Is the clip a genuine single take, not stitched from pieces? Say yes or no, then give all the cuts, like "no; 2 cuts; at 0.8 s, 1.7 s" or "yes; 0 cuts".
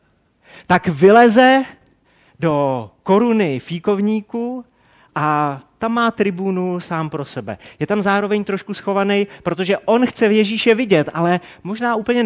yes; 0 cuts